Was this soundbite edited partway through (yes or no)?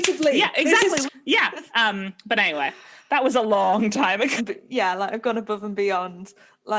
yes